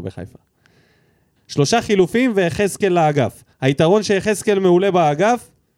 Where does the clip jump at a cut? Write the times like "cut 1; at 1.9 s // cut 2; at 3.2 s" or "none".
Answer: cut 1; at 1.4 s // cut 2; at 3.5 s